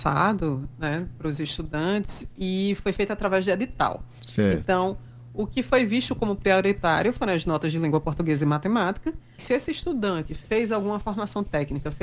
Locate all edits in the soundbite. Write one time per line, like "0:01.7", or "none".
0:04.2
0:09.4